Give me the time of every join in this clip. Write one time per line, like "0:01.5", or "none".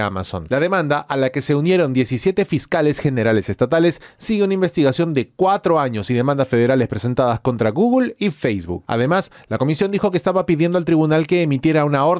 none

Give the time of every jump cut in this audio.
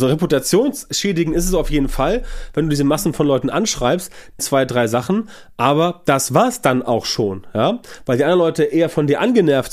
0:04.4

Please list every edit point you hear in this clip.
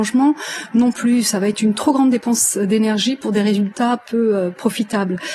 none

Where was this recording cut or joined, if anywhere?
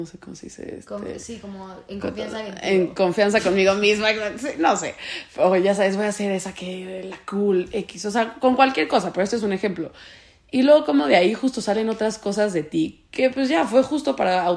none

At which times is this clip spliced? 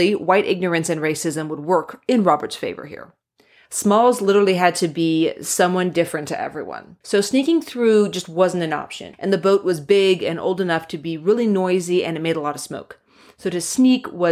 0:03.7
0:07.0
0:09.1

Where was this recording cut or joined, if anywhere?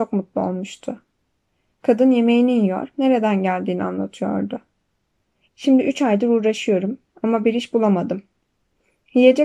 0:02.9
0:05.5

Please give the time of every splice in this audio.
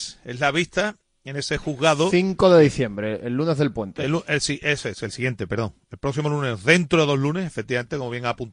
none

